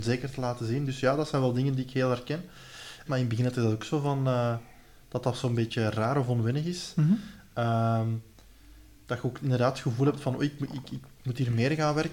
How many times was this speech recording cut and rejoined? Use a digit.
1